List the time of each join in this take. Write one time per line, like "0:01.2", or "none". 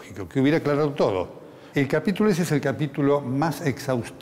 0:01.7